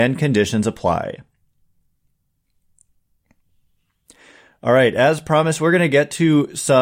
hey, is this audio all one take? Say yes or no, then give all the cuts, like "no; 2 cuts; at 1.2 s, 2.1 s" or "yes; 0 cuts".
yes; 0 cuts